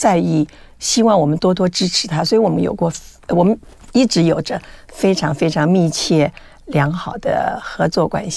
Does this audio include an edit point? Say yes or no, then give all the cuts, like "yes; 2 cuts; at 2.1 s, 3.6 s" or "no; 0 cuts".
no; 0 cuts